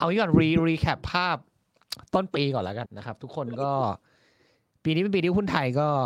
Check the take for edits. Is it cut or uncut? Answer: cut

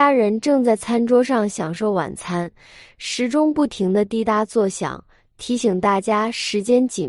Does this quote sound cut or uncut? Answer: uncut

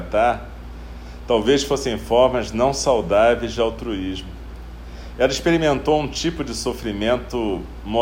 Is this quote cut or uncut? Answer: uncut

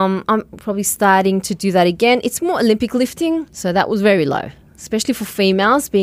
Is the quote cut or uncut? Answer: cut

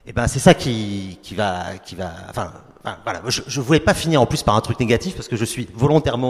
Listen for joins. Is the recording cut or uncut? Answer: uncut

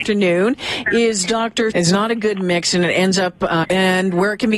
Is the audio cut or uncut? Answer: cut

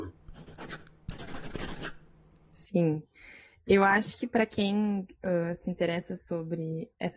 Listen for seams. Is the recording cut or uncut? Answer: uncut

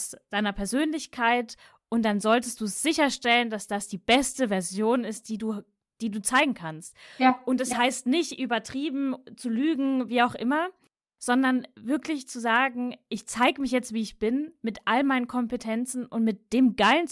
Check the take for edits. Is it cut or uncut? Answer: uncut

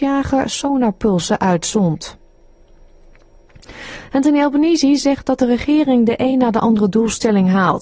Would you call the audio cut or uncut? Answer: uncut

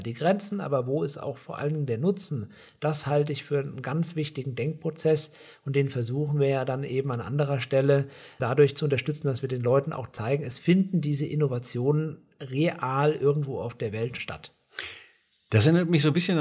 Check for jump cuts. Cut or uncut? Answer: cut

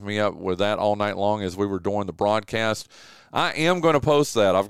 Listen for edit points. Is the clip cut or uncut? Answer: cut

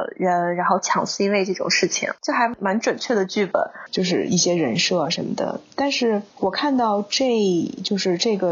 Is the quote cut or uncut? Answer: cut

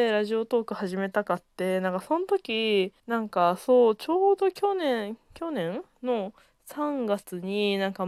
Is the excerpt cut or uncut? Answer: cut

